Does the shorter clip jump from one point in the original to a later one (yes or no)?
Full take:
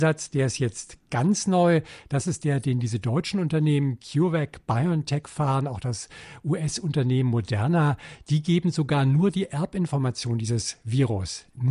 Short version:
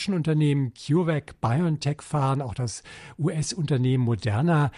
no